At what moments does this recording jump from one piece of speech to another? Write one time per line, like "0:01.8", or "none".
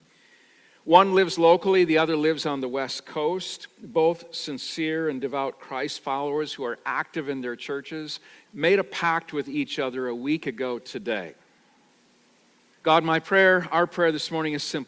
0:08.4
0:12.7

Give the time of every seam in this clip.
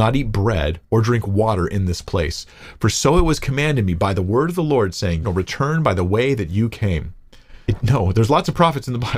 0:05.2
0:07.7

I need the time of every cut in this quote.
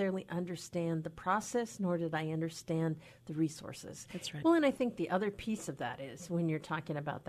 0:04.4

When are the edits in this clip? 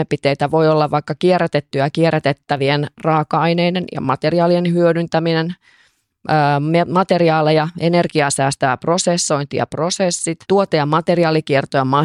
0:10.4

